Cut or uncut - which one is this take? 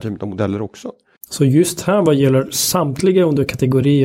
cut